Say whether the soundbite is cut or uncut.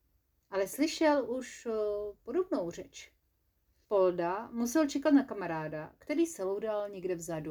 cut